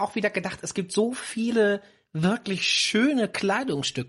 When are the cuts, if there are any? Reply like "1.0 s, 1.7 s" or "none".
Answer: none